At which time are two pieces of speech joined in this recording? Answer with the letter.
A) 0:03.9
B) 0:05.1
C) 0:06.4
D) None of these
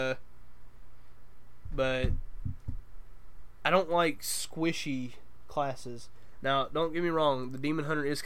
D